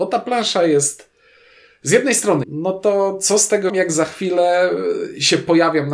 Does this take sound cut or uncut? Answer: cut